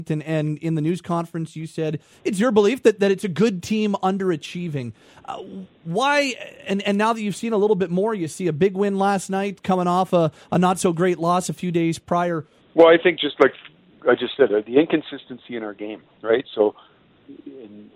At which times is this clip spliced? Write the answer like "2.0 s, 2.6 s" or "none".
12.6 s